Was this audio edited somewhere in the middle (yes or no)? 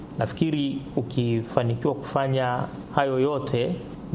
no